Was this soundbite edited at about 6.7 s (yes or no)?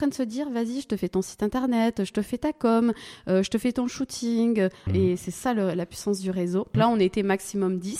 yes